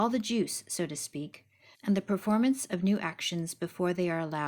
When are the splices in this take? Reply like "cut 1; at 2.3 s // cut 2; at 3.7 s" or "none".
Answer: cut 1; at 1.7 s